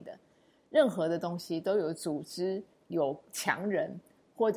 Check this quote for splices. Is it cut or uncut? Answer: cut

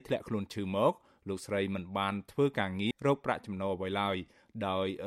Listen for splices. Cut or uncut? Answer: cut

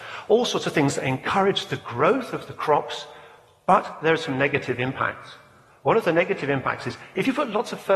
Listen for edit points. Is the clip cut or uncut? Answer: uncut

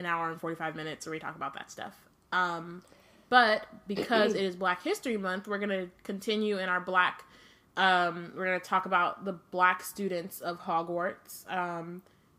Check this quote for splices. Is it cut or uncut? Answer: uncut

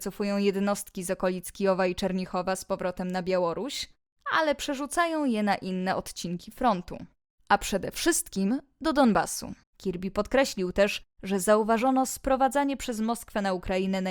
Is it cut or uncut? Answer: cut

